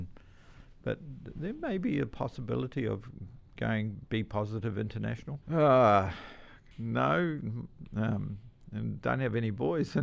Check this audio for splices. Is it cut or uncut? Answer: cut